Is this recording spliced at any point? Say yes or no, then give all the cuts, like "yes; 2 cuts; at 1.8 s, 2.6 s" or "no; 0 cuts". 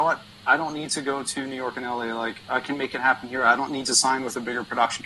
no; 0 cuts